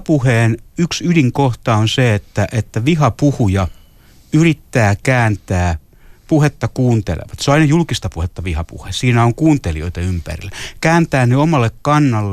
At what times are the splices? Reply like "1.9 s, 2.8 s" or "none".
none